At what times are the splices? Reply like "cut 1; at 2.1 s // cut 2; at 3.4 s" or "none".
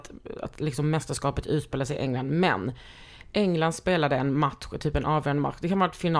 none